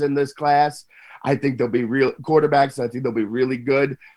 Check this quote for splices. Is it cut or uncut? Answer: uncut